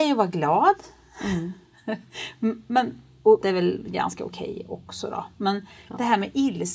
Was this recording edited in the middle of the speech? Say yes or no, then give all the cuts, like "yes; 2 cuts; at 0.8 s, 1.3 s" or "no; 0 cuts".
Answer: yes; 1 cut; at 3.4 s